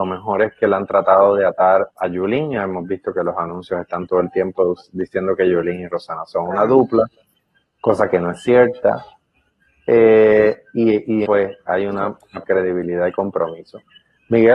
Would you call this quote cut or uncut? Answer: cut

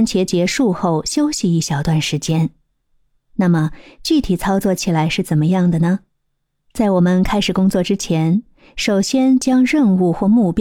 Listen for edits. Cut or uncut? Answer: cut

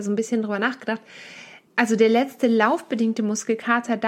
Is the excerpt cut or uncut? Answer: cut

